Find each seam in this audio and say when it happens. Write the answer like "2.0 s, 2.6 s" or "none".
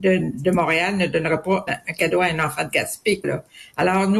1.7 s, 3.2 s

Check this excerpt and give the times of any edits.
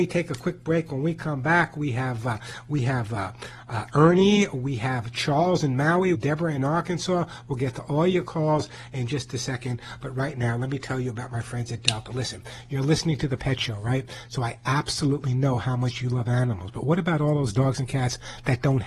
6.1 s

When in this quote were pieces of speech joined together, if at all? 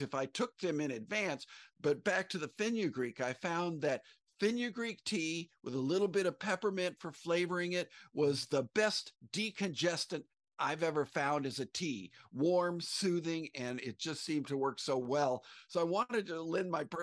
none

